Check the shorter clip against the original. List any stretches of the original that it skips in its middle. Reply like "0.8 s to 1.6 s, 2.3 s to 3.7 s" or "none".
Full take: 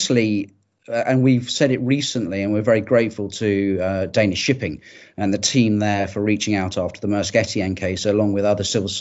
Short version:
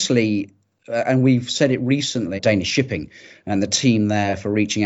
2.4 s to 4.1 s